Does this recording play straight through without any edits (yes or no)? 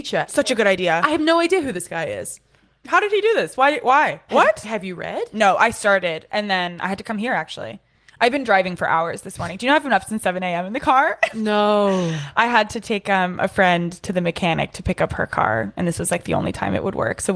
yes